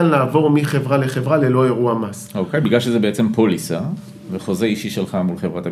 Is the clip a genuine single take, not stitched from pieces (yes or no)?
yes